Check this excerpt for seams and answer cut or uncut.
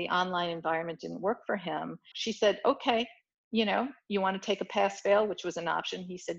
cut